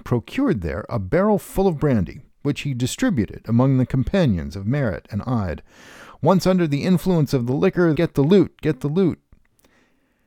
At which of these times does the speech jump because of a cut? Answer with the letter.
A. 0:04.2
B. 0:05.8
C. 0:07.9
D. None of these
C